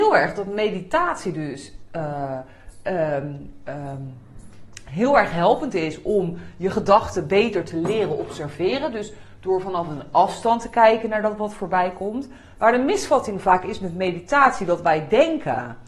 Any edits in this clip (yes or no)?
no